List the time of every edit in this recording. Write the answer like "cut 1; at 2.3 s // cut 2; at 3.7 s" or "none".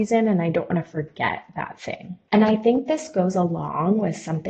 cut 1; at 2.3 s